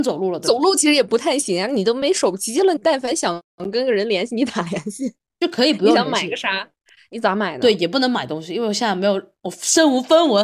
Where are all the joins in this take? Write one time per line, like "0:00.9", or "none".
0:02.8